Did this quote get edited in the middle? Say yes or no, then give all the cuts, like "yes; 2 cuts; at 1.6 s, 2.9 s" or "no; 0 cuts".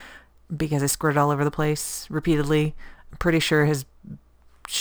no; 0 cuts